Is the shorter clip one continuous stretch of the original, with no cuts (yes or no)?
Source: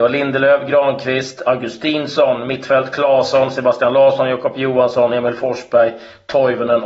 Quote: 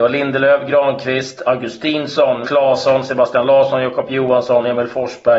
no